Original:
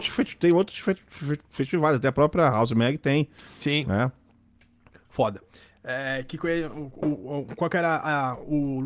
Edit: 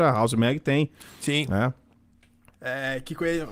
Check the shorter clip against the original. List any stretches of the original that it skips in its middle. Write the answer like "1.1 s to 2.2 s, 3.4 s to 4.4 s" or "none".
4.9 s to 5.7 s